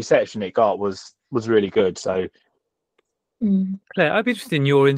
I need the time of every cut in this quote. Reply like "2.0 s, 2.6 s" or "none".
3.8 s

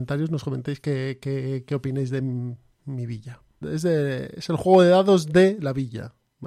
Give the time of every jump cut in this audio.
3.6 s

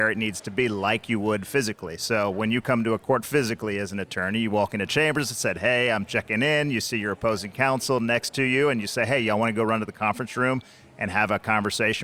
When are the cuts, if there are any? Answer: none

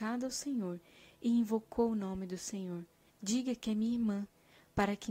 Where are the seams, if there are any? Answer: 3.1 s

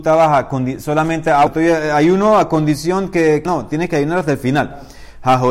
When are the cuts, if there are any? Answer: 1.5 s, 3.5 s

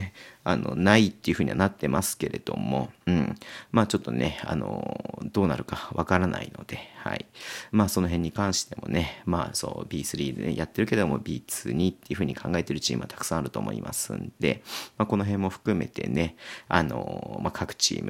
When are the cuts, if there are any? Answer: none

